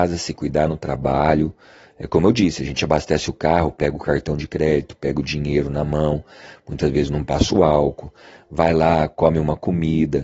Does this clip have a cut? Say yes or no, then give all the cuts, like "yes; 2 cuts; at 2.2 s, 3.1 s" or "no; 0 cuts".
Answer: no; 0 cuts